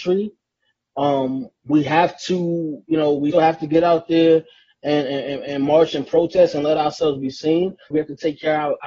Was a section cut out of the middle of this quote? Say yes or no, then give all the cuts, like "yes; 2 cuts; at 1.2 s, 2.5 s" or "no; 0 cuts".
yes; 2 cuts; at 3.3 s, 7.9 s